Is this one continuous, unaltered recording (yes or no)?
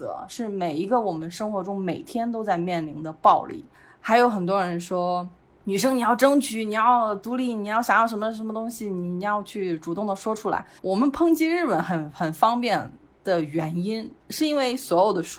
no